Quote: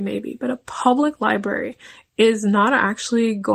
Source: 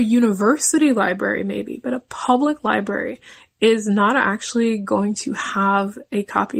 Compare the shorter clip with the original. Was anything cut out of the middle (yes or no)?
no